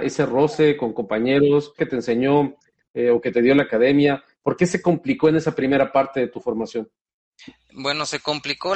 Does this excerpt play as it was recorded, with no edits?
no; 1 cut; at 1.8 s

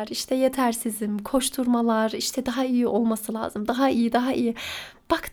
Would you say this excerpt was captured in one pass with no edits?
yes; 0 cuts

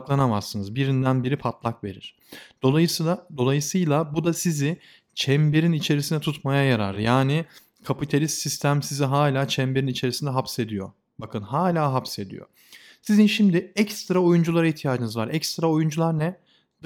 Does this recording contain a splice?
no; 0 cuts

